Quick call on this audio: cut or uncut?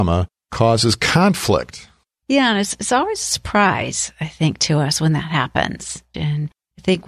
cut